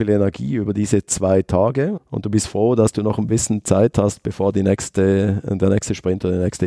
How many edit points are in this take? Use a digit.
1